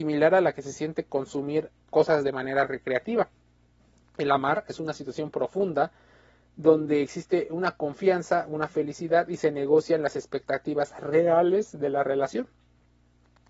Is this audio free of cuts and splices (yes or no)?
yes